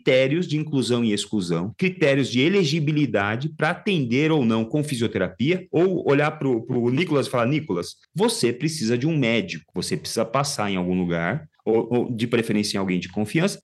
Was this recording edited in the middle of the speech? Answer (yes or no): no